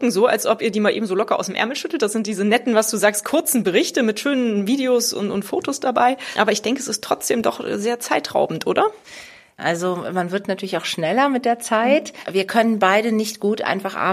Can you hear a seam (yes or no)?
yes